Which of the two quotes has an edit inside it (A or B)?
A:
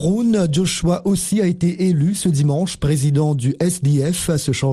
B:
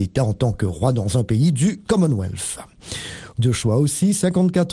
B